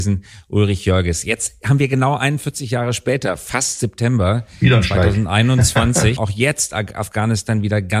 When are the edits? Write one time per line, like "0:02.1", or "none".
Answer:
0:06.2